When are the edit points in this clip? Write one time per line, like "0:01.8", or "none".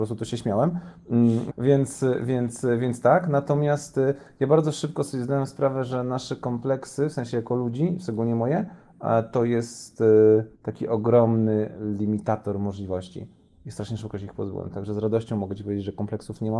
0:01.5
0:10.5

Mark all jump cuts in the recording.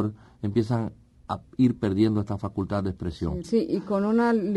0:01.1
0:03.4

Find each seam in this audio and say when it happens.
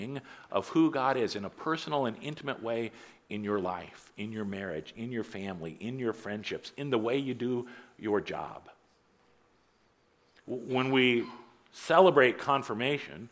none

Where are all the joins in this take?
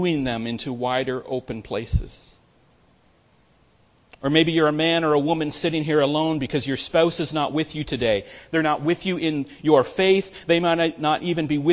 none

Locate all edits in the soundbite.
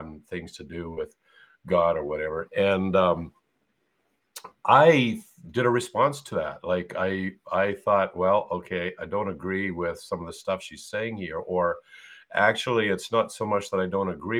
0:02.5

